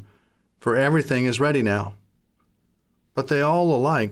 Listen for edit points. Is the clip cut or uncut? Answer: uncut